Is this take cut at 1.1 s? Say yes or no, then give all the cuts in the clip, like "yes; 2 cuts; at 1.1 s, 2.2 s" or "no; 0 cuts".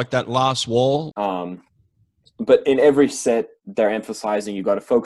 yes; 1 cut; at 1.1 s